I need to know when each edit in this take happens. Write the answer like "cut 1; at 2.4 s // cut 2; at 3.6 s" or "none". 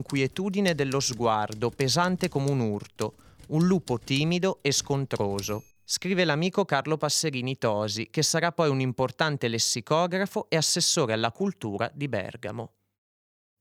cut 1; at 5.7 s